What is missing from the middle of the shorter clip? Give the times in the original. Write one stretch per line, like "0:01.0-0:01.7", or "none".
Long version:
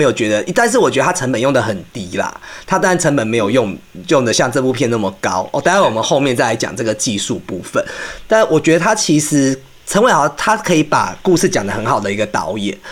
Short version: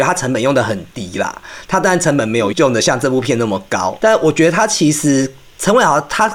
0:03.5-0:04.0
0:05.5-0:08.3

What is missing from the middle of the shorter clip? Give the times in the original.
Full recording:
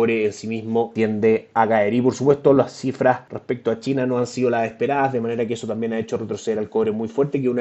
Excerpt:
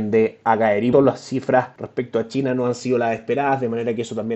0:02.0-0:02.4

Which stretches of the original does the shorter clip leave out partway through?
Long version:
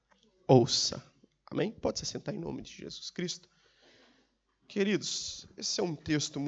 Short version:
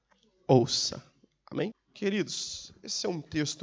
0:01.7-0:04.5

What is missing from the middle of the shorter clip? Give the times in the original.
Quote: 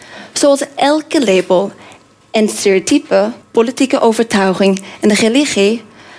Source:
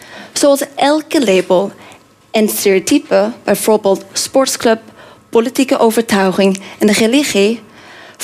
0:03.4-0:05.2

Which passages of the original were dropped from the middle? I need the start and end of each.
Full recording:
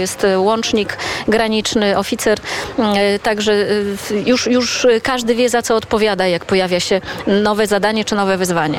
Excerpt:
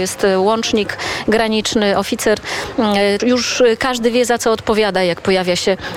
0:03.2-0:04.4

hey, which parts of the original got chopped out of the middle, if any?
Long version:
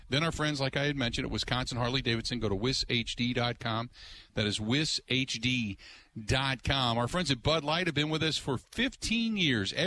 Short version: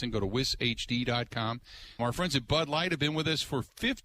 0:04.3-0:06.9

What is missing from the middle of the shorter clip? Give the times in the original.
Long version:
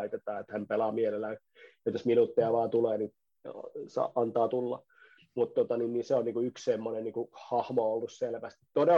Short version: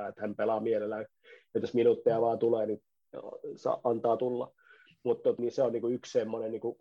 0:05.7-0:05.9

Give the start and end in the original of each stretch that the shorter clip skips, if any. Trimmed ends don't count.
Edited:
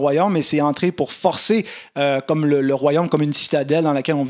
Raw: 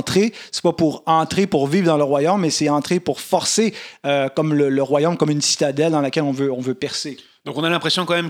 none

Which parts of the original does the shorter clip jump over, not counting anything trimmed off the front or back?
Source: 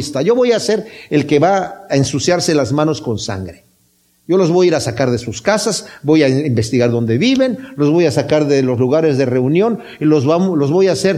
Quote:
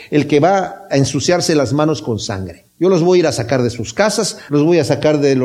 0:03.7-0:04.2
0:06.0-0:07.7

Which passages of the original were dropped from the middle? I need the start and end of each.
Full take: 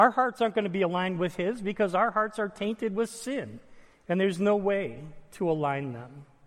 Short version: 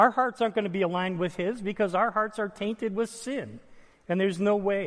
none

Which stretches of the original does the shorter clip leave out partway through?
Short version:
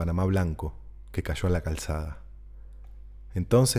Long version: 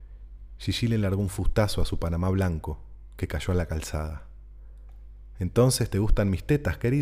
none

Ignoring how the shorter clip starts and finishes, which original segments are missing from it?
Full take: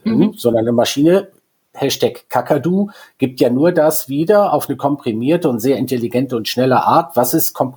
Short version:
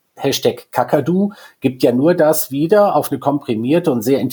none

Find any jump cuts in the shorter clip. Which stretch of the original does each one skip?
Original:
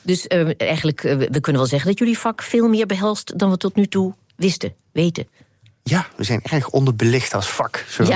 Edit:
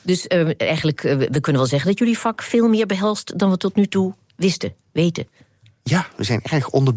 none

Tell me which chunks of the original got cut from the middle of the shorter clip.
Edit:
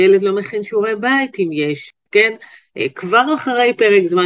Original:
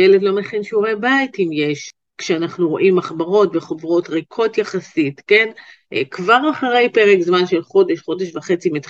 0:02.1-0:05.2

